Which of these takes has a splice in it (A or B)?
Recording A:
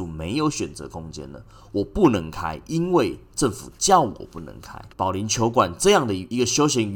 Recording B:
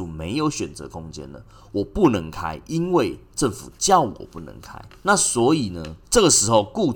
A